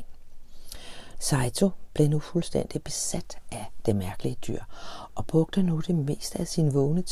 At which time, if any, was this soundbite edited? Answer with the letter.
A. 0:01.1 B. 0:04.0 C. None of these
A